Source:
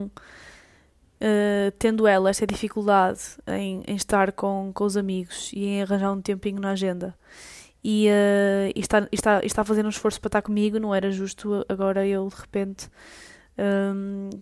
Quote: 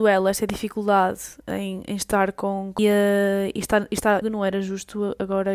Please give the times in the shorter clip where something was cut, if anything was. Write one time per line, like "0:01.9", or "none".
0:02.8
0:04.2